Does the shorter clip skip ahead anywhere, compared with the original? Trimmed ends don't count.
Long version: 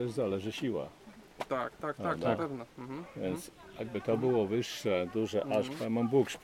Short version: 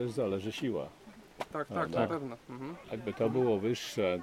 yes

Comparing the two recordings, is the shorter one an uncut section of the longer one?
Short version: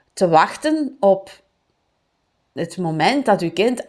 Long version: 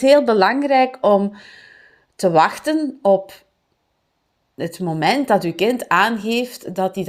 yes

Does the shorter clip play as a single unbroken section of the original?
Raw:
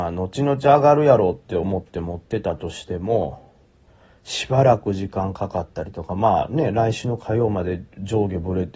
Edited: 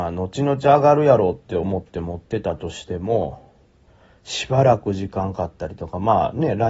no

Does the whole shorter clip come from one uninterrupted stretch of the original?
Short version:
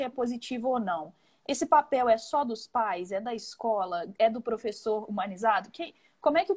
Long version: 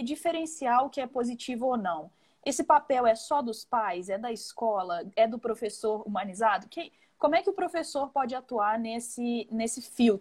yes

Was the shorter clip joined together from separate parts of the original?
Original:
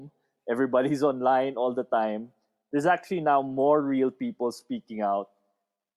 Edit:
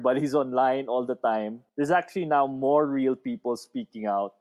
yes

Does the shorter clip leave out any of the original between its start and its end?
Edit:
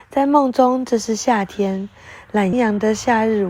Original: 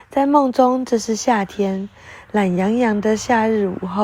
yes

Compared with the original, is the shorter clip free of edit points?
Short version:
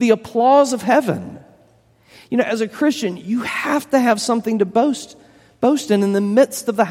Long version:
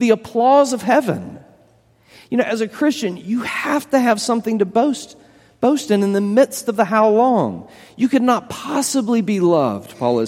yes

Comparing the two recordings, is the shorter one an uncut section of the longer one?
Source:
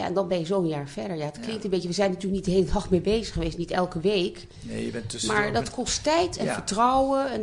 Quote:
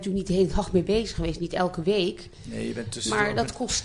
yes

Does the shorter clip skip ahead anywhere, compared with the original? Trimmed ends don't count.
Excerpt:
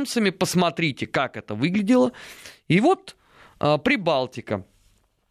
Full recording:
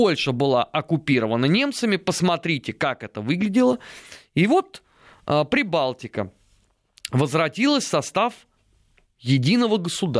no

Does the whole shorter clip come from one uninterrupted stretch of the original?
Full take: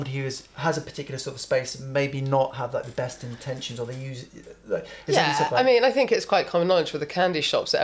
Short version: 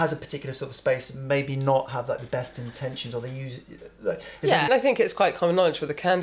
no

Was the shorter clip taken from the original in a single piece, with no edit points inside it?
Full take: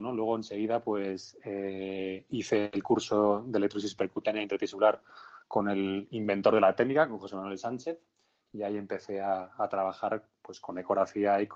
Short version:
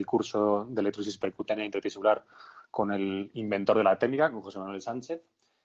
yes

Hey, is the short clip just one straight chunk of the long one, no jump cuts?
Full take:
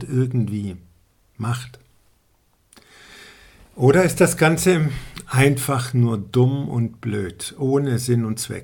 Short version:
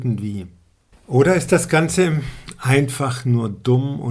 no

